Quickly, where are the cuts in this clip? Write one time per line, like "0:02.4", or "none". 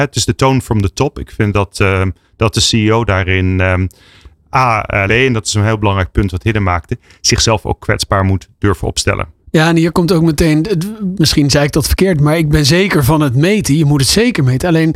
0:05.1

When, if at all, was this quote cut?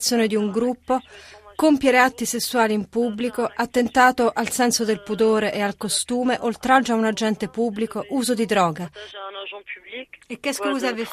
none

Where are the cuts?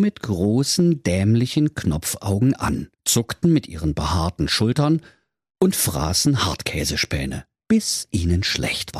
0:02.9

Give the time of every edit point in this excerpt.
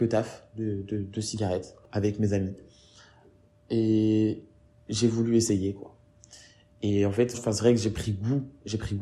0:07.3

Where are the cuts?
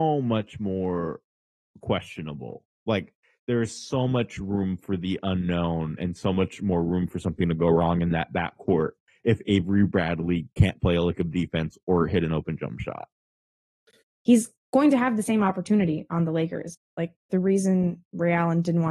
0:14.0
0:16.7

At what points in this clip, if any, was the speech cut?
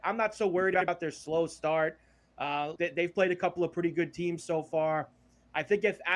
0:02.8

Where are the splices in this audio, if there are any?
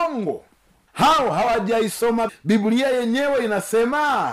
0:02.3

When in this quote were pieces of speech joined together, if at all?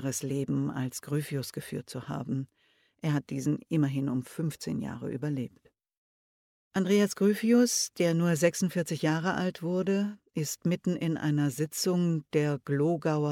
none

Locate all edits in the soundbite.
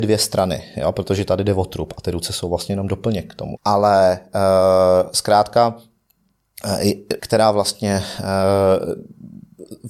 0:03.6
0:07.2

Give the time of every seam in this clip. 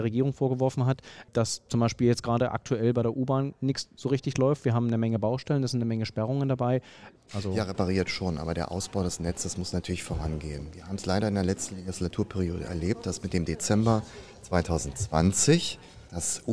0:07.3

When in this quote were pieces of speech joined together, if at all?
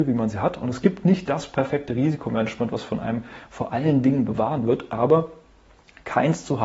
none

